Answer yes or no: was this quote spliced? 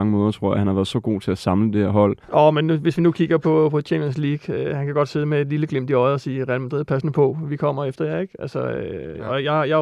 yes